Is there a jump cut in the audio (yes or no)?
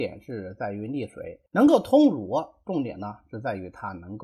yes